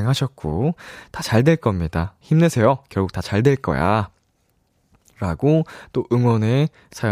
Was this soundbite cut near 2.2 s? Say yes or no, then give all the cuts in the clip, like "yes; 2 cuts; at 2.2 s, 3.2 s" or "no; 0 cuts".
yes; 1 cut; at 2.2 s